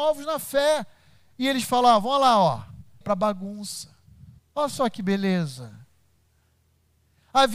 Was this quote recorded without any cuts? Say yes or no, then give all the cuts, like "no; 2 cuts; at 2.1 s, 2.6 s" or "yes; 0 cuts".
no; 2 cuts; at 3.0 s, 4.4 s